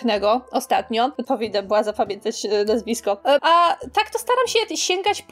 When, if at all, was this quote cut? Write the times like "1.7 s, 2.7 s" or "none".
1.2 s, 3.4 s